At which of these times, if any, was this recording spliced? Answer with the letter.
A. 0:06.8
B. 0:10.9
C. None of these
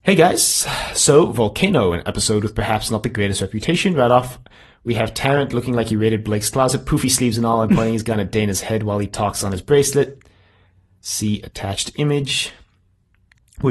C